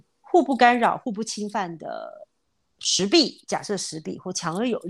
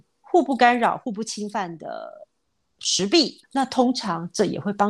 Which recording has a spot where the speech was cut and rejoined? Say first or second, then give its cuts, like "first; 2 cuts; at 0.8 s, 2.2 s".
second; 1 cut; at 3.4 s